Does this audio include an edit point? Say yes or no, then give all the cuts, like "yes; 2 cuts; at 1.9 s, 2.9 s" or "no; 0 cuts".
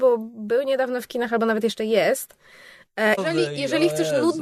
yes; 1 cut; at 3.2 s